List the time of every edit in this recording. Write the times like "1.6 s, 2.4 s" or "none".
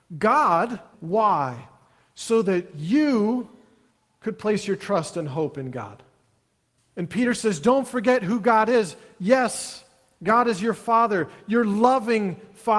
0.9 s, 6.8 s